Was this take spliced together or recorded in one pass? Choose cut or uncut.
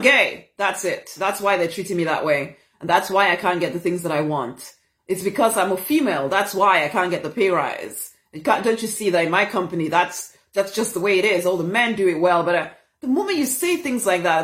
uncut